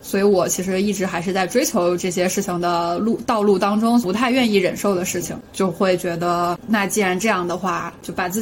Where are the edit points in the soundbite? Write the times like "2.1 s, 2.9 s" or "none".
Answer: 4.0 s